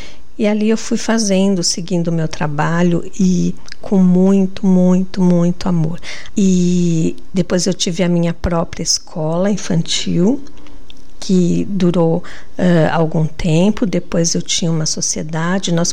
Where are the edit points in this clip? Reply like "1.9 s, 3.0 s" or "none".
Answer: 6.3 s

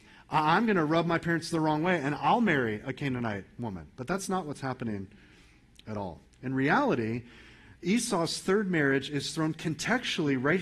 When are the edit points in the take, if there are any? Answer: none

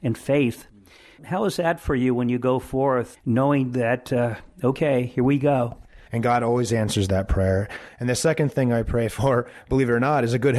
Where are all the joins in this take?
6.1 s

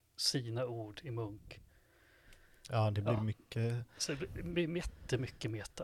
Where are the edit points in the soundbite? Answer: none

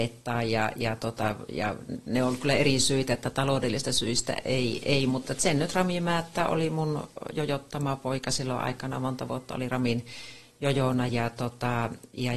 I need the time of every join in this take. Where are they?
none

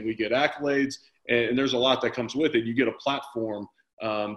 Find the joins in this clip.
none

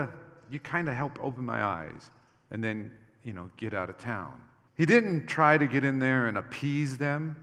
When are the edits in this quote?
4.7 s

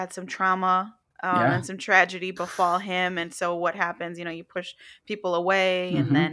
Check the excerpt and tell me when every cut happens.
none

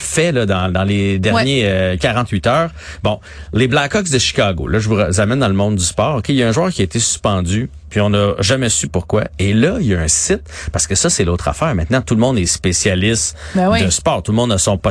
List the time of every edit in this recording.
none

